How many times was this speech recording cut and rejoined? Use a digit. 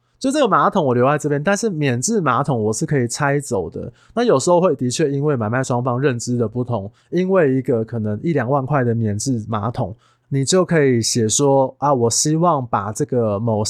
1